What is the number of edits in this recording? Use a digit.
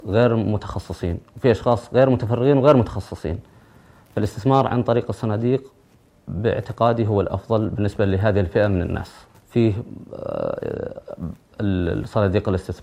1